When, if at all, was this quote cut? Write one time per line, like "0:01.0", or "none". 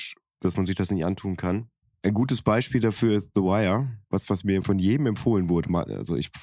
0:04.6